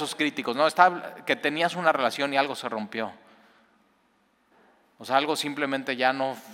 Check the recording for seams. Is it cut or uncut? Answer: uncut